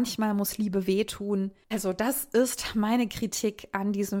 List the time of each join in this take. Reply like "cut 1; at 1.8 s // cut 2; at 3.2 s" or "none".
cut 1; at 1.7 s

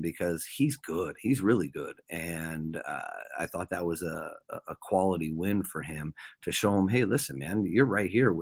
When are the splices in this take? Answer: none

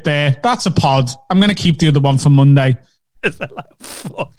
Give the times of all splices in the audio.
cut 1; at 3.2 s

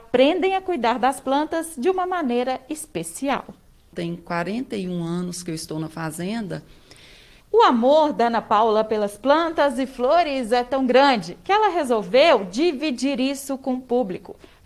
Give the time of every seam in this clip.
cut 1; at 7.4 s

